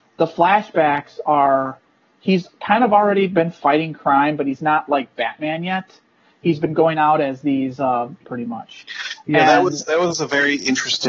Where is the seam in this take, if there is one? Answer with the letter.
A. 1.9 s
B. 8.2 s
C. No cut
B